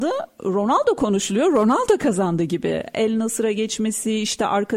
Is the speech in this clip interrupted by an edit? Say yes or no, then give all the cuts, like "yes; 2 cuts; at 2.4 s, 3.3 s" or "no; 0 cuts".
no; 0 cuts